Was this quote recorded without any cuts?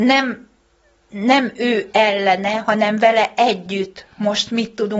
yes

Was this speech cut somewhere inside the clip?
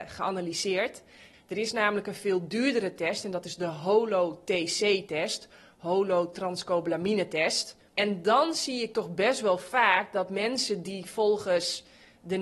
yes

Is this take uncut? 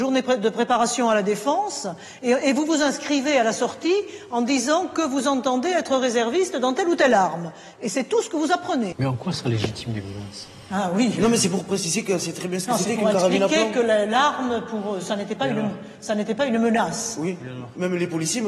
no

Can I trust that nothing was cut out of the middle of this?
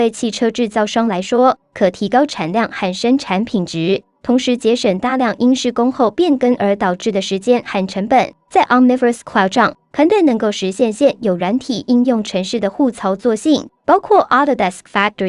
yes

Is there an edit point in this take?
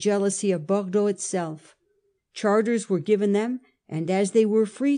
yes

